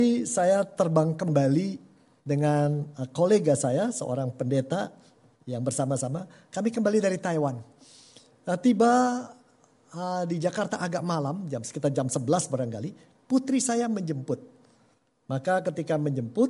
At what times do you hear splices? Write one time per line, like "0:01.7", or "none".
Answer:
none